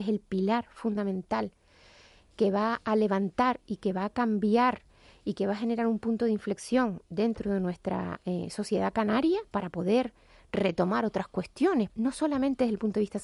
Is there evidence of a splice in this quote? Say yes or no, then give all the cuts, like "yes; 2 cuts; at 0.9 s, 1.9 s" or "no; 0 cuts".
yes; 1 cut; at 11.9 s